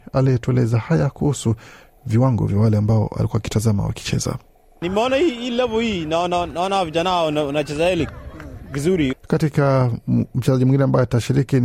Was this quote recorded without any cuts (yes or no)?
no